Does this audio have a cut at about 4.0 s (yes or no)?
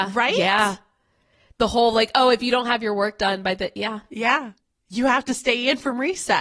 no